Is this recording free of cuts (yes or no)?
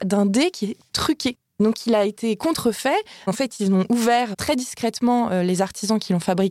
yes